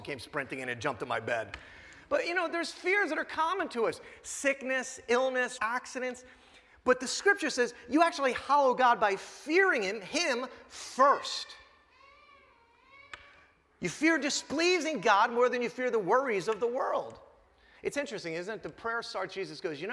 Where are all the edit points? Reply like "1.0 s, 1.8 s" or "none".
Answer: 5.6 s